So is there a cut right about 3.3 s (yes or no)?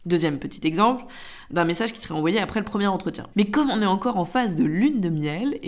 yes